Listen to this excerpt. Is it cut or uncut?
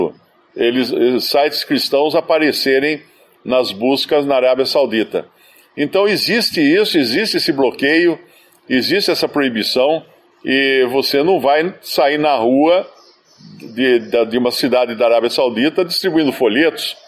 uncut